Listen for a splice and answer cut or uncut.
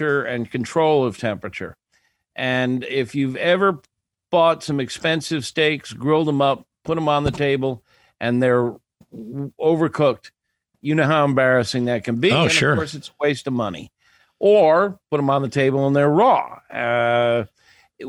uncut